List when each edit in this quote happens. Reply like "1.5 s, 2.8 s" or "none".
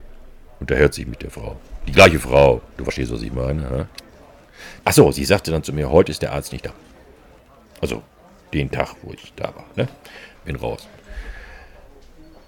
4.8 s, 10.3 s